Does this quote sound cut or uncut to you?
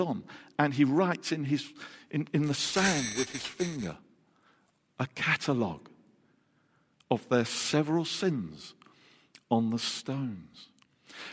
uncut